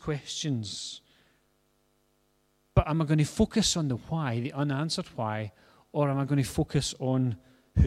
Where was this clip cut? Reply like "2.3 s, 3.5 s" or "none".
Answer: none